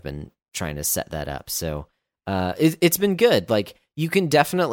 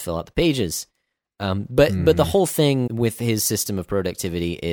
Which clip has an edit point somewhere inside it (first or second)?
second